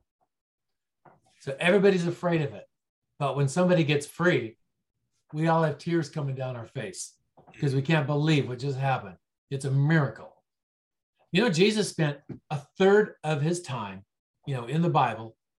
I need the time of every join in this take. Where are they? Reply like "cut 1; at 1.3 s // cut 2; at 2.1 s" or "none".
none

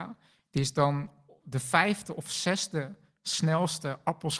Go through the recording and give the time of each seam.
none

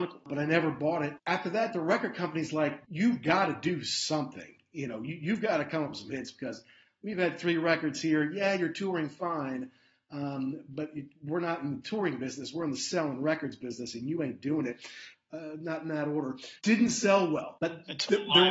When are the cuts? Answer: cut 1; at 15.1 s

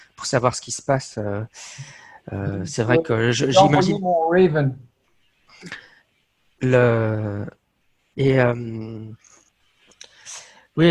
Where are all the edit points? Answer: cut 1; at 8.1 s

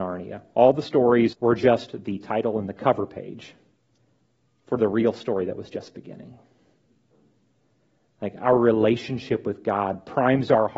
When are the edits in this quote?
cut 1; at 1.3 s

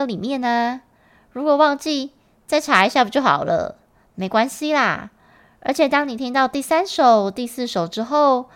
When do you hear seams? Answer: none

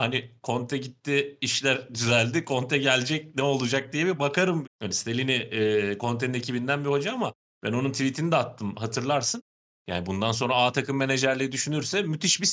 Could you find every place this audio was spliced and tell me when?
cut 1; at 4.6 s

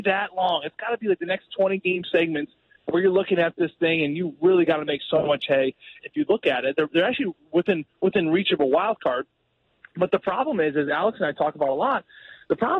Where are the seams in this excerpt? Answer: cut 1; at 6.0 s

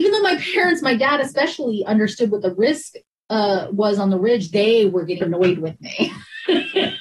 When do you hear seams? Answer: cut 1; at 5.2 s

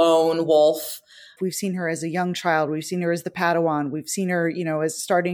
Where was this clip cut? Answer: cut 1; at 1.4 s

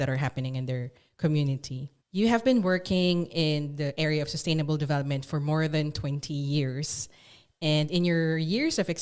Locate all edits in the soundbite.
cut 1; at 2.0 s

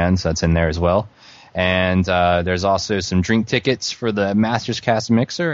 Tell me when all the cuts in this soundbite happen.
none

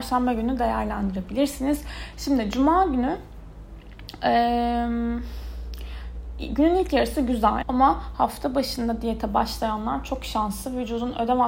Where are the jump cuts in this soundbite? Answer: cut 1; at 2.1 s // cut 2; at 7.6 s

